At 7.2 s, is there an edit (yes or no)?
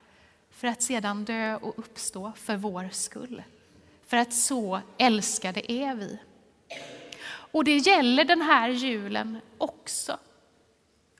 no